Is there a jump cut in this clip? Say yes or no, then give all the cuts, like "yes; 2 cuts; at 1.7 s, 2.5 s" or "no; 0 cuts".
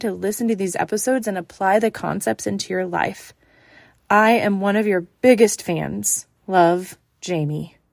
yes; 1 cut; at 6.4 s